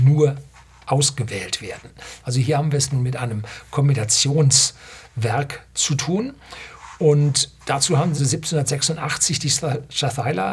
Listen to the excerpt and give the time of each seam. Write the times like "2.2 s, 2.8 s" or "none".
8.2 s